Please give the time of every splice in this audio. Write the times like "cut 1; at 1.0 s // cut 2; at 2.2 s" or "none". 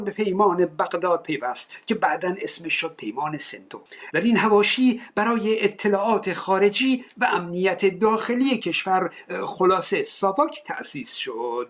none